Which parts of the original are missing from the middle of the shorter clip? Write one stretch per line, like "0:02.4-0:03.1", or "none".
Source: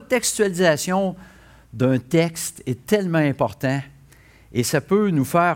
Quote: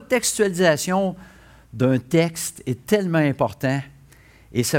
none